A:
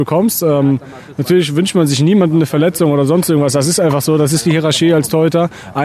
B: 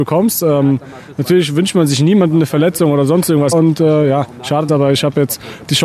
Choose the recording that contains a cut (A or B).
B